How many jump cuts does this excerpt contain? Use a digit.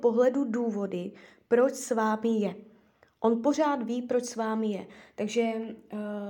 0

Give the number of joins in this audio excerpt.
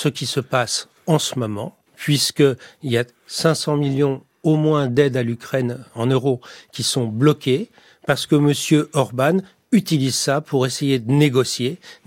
1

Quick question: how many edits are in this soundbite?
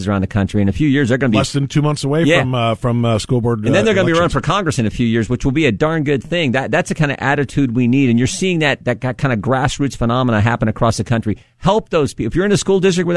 0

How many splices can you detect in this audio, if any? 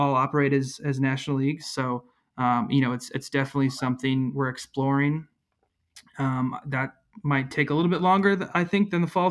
1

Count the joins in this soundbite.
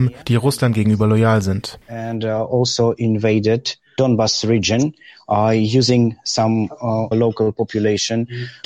1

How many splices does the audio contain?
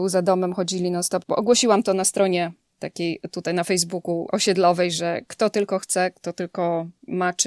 0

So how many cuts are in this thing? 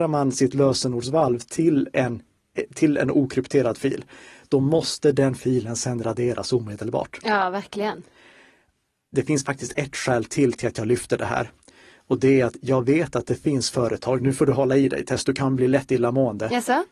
0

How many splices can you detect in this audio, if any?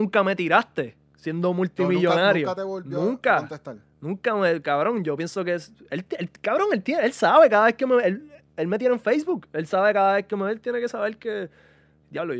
0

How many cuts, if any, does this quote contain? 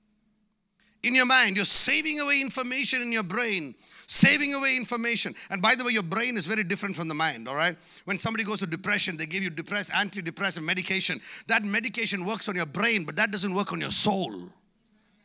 0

